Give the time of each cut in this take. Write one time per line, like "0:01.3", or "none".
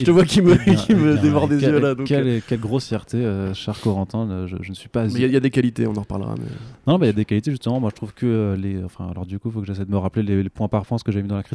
none